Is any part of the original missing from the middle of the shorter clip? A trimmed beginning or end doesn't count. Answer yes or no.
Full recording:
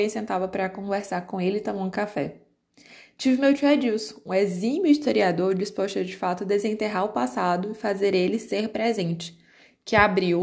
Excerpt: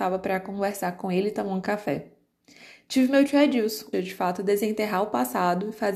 yes